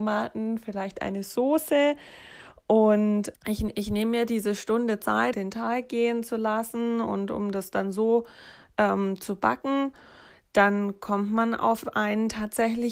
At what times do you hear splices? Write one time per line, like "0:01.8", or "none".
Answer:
0:03.3
0:05.3